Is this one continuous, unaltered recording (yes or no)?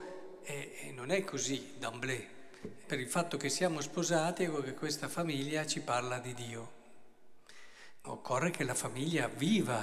no